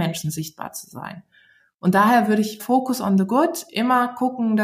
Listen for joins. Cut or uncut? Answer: cut